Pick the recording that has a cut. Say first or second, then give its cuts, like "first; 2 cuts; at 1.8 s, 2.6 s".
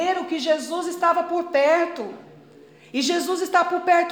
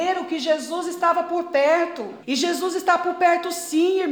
second; 1 cut; at 2.2 s